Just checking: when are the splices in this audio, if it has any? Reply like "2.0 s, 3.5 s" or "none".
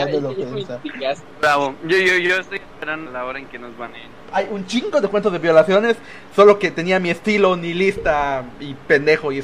3.1 s, 4.2 s

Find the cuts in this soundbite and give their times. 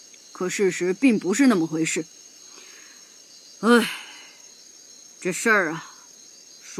none

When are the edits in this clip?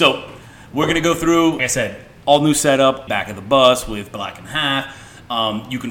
1.6 s, 3.1 s

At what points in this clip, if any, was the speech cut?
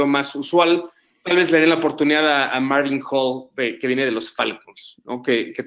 none

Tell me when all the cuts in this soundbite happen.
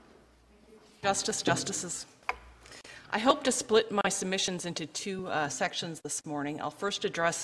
none

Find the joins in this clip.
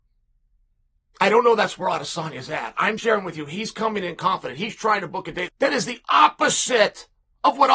3.0 s, 5.5 s

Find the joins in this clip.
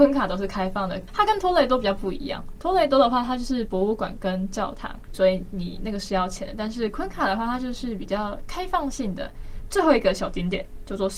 5.1 s, 9.7 s

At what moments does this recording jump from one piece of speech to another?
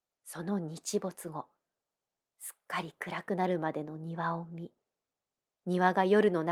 none

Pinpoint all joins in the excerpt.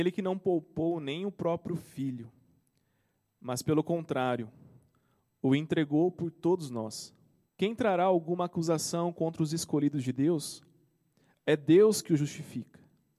7.5 s

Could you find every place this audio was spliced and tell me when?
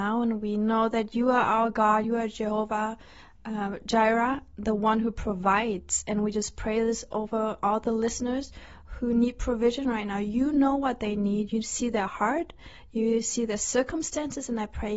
none

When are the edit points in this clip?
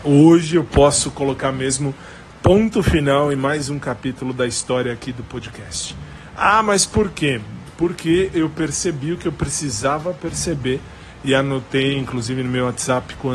none

